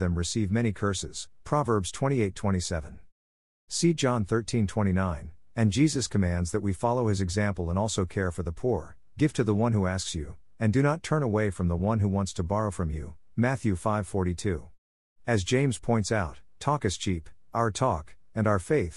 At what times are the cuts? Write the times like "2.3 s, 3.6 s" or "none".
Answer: 3.7 s